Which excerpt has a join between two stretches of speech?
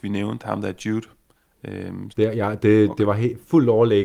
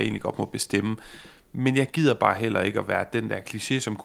first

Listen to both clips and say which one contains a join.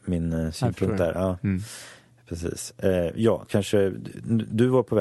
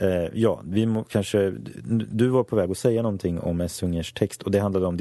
first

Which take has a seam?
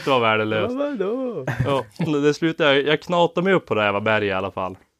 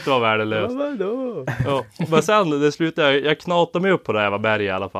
first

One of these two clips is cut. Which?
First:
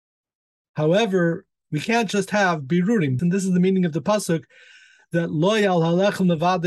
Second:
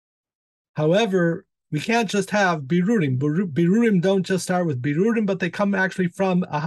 first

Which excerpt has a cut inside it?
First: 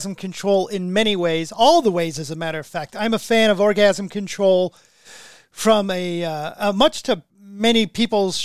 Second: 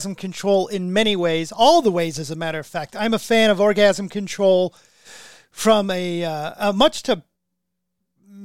first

